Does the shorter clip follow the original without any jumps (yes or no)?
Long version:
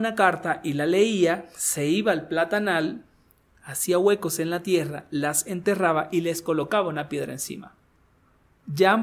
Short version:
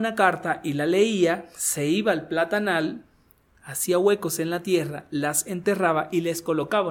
yes